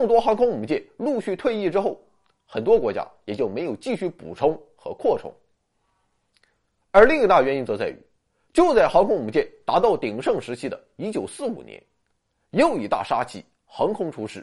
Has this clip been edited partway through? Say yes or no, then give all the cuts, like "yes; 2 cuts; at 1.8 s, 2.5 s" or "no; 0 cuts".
no; 0 cuts